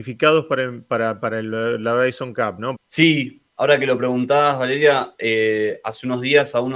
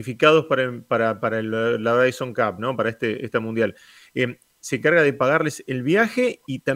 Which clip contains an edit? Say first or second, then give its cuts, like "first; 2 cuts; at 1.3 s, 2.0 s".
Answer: first; 1 cut; at 2.8 s